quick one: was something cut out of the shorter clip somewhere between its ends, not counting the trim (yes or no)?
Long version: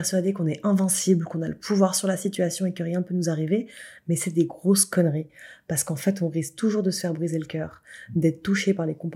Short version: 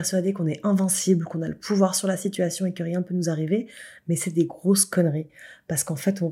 no